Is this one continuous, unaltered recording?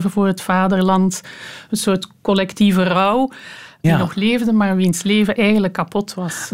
no; 1 cut; at 3.8 s

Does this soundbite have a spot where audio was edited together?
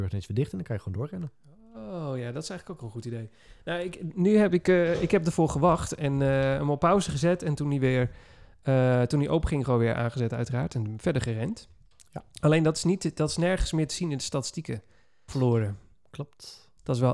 yes; 1 cut; at 15.3 s

